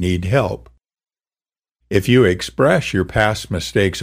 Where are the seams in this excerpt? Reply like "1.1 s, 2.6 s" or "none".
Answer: 1.8 s

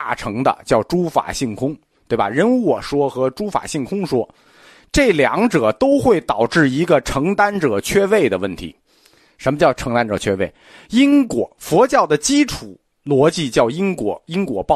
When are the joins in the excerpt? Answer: none

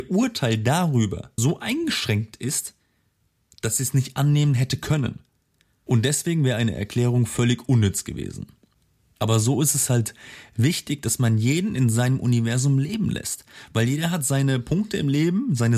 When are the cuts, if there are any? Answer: 1.4 s, 9.2 s

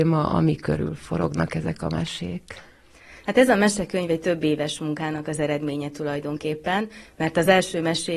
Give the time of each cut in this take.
3.2 s

